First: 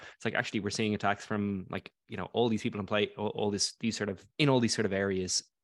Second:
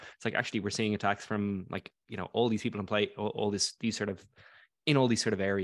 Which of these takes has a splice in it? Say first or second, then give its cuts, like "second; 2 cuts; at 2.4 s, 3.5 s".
first; 1 cut; at 4.3 s